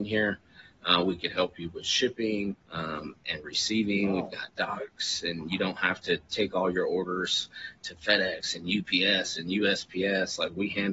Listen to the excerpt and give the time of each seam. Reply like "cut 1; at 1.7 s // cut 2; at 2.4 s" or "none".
cut 1; at 2.6 s